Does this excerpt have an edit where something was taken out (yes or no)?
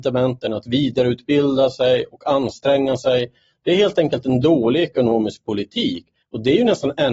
yes